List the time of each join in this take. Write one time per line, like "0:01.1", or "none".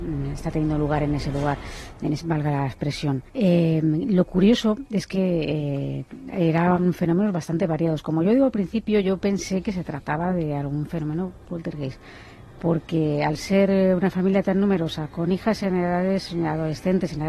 0:03.3
0:11.5

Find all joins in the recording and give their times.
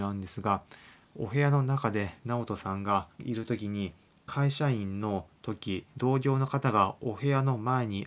0:03.1
0:05.9

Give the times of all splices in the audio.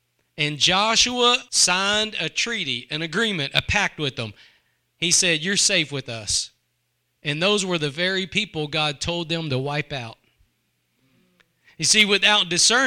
0:01.5

